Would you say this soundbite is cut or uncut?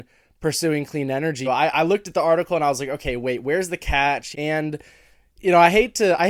cut